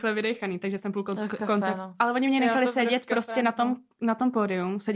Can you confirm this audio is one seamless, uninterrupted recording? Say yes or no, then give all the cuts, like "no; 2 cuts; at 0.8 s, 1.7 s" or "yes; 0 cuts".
yes; 0 cuts